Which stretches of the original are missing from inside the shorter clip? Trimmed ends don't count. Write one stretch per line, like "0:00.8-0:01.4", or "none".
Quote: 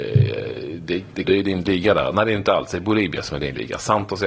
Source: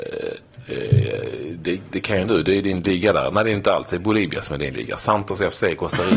0:02.0-0:02.4